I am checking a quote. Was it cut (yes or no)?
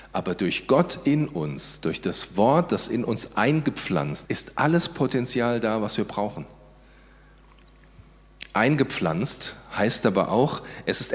yes